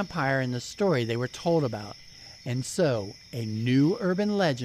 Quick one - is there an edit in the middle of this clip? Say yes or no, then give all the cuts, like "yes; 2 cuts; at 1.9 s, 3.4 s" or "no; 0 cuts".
no; 0 cuts